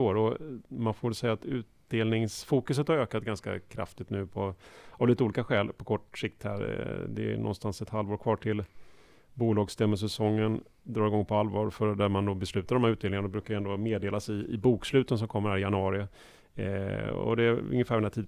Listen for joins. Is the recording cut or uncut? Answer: uncut